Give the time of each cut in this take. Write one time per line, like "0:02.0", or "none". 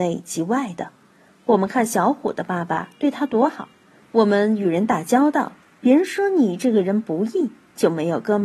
0:04.0